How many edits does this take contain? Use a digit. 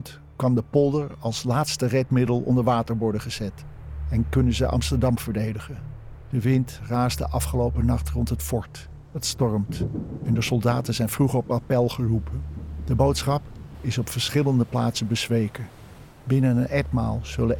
1